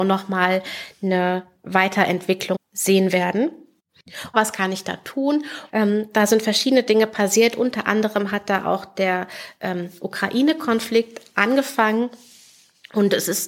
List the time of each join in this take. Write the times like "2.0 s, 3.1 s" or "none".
2.5 s, 4.3 s, 5.7 s